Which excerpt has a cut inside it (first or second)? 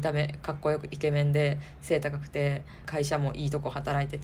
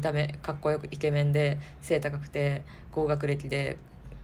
first